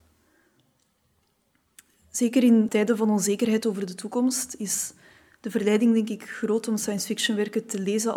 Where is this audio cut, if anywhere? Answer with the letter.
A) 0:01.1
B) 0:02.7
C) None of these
B